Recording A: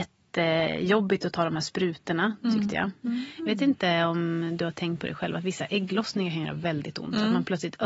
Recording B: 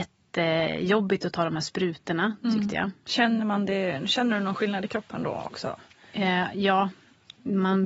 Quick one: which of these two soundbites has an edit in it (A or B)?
A